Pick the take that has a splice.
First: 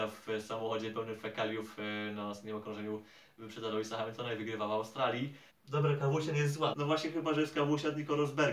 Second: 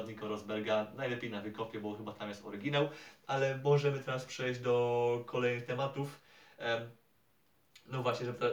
first; 2 cuts; at 5.5 s, 6.7 s

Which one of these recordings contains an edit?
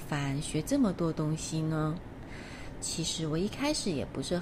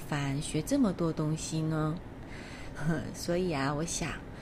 second; 1 cut; at 2.7 s

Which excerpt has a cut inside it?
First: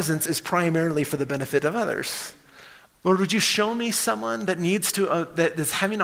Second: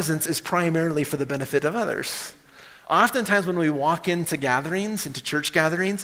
first; 1 cut; at 2.9 s

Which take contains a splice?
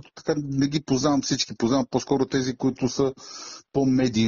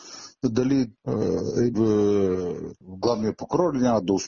second; 2 cuts; at 1.7 s, 2.8 s

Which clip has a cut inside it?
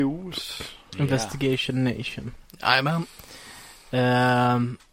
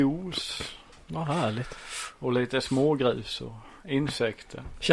first; 1 cut; at 0.9 s

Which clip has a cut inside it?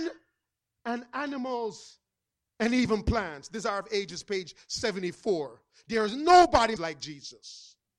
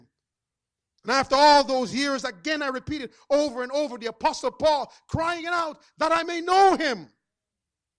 first; 1 cut; at 6.8 s

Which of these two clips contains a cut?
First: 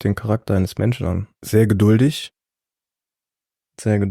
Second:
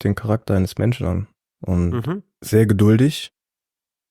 first; 1 cut; at 1.4 s

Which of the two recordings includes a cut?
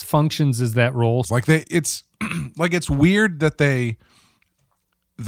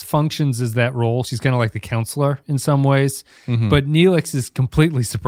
first; 1 cut; at 1.2 s

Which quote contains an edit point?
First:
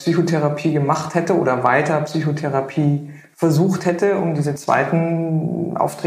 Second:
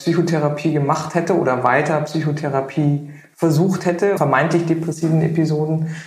second; 1 cut; at 4.2 s

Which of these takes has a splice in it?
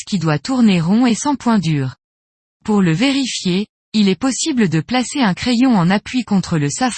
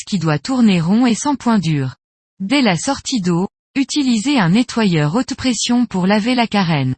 second; 1 cut; at 2.2 s

